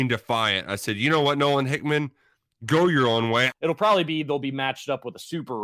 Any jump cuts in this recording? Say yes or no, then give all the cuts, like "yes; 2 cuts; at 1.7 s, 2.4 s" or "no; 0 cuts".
yes; 1 cut; at 3.5 s